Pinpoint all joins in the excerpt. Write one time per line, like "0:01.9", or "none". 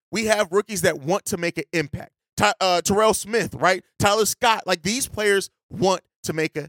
none

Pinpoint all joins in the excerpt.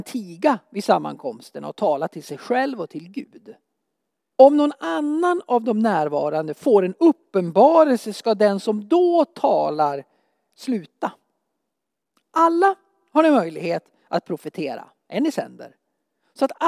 0:04.3

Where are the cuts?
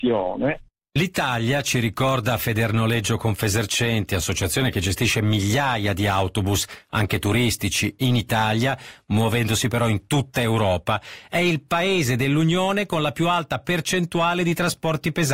none

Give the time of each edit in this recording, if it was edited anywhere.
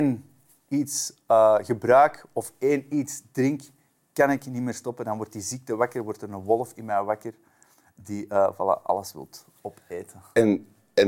none

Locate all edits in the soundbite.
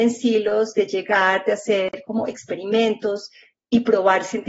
none

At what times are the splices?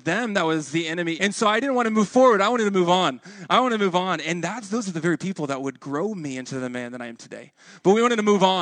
0:01.2

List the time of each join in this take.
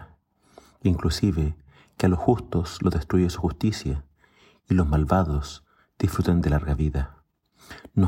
none

